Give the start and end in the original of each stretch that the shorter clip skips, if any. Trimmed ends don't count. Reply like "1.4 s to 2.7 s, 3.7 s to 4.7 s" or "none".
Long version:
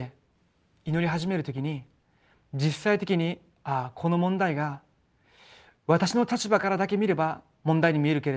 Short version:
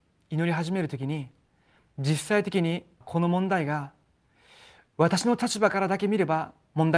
3.6 s to 3.9 s

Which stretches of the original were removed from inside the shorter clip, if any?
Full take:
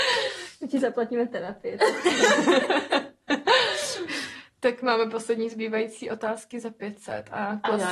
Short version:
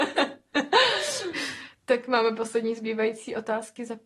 none

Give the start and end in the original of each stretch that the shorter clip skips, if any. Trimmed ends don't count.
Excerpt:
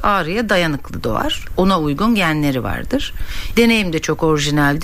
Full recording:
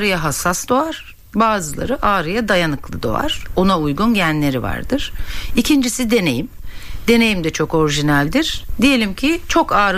5.5 s to 7.0 s

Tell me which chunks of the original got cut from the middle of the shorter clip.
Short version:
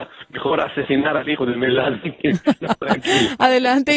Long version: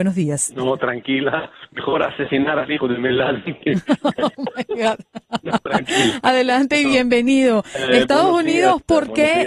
4.0 s to 5.4 s

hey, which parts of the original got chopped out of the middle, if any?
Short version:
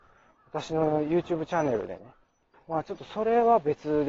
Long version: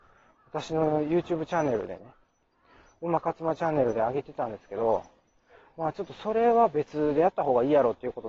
2.5 s to 5.6 s

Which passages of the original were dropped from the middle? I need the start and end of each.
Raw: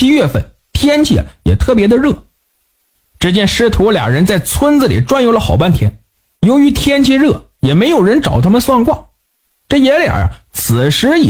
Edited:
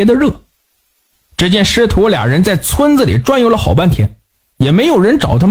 6.3 s to 7.5 s

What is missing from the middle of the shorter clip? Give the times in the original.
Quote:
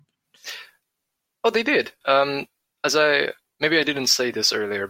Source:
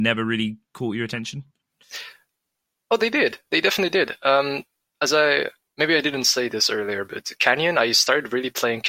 3.5 s to 4.2 s

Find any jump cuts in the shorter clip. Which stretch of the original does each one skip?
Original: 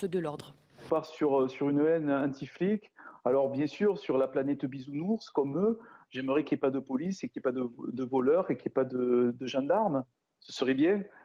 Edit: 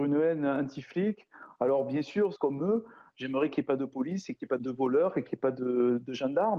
4.0 s to 5.3 s, 7.5 s to 7.9 s

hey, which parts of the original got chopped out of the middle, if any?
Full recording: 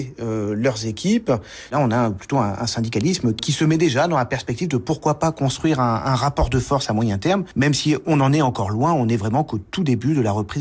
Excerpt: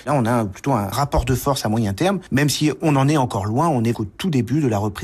2.6 s to 6.2 s, 9.2 s to 9.5 s

